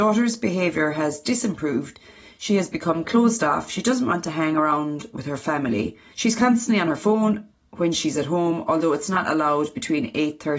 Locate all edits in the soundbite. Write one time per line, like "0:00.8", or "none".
0:06.1

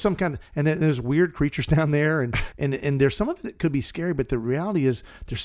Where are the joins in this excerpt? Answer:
0:02.5

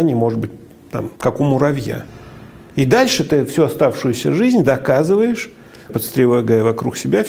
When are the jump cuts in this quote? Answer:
0:01.2
0:05.9

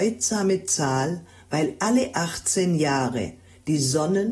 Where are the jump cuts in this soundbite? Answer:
none

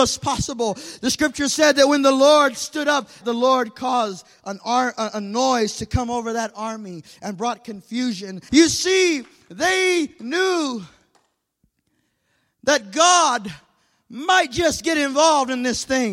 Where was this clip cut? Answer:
0:03.2
0:08.5

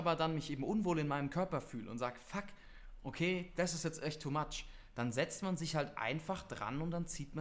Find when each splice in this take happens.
none

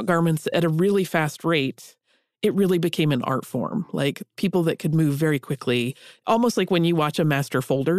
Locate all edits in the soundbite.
none

